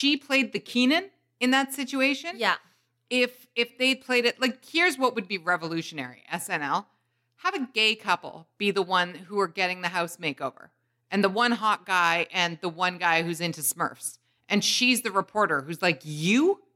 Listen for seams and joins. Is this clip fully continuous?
yes; 0 cuts

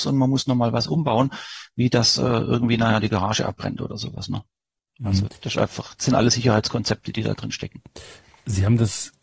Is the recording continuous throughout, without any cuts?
yes; 0 cuts

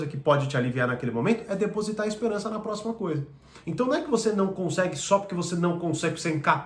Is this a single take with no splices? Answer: no; 1 cut; at 3.6 s

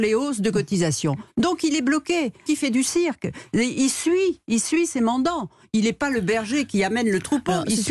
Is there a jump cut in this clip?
yes; 1 cut; at 2.5 s

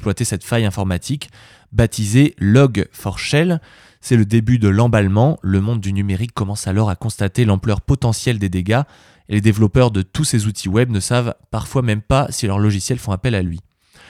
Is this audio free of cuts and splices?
no; 1 cut; at 9.1 s

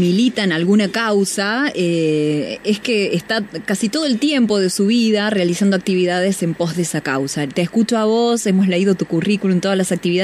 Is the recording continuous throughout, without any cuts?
yes; 0 cuts

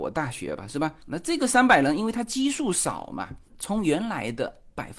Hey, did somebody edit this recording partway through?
yes; 1 cut; at 1.0 s

